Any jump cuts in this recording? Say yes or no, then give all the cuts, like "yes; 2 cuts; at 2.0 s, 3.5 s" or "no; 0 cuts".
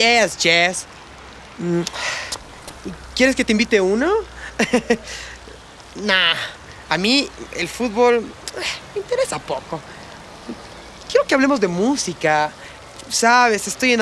no; 0 cuts